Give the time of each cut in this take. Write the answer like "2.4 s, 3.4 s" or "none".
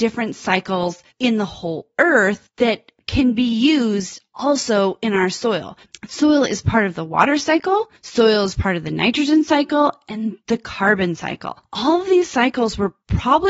none